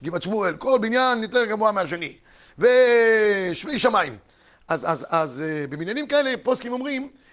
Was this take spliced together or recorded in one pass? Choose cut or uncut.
uncut